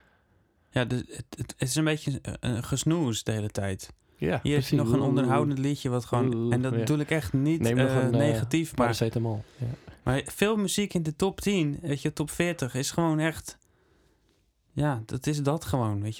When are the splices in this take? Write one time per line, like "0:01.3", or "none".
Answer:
none